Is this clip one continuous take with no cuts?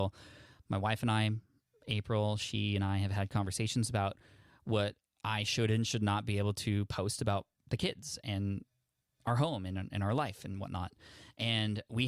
yes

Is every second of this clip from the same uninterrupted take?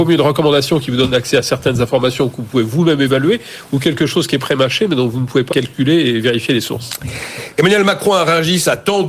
no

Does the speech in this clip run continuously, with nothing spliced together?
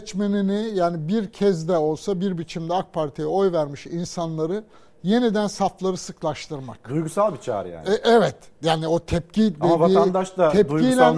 yes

